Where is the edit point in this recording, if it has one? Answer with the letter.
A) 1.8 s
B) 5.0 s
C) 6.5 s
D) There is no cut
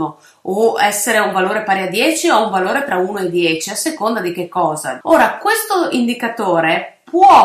B